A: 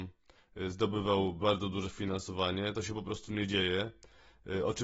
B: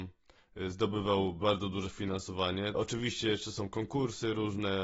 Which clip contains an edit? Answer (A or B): B